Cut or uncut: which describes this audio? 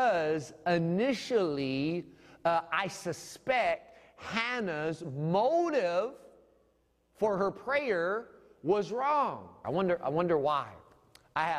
cut